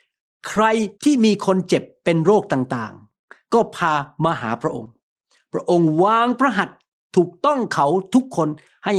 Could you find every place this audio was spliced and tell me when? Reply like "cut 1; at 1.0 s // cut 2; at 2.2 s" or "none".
cut 1; at 0.9 s